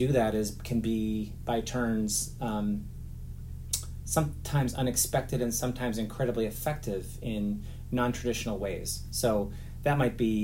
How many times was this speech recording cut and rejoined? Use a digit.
0